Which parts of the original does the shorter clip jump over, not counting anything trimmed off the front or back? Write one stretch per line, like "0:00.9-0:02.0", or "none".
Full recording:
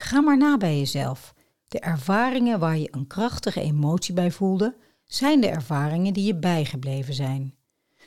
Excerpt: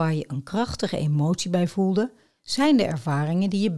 none